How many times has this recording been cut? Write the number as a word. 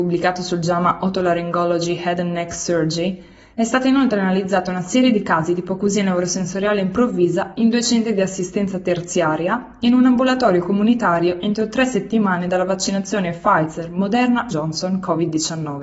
one